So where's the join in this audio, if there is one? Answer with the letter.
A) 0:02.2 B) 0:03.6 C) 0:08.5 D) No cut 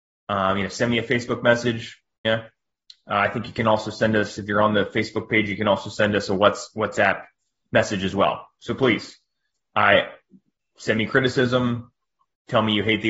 A